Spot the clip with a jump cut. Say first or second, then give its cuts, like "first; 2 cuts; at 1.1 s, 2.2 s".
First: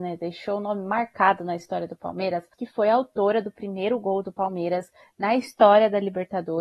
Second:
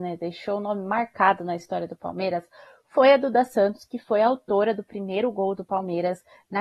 first; 1 cut; at 2.5 s